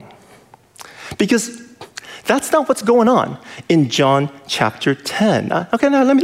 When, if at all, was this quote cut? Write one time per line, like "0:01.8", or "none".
none